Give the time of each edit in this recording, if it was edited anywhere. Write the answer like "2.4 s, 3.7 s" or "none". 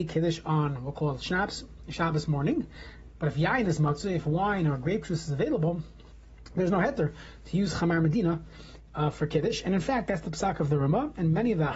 3.2 s